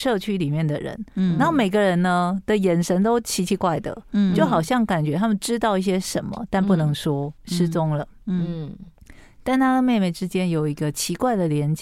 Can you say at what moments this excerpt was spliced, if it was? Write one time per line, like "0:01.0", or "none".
0:03.6
0:07.4